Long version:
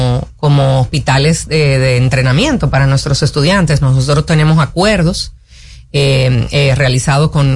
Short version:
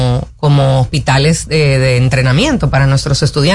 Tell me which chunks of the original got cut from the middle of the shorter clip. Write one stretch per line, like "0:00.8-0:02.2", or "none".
none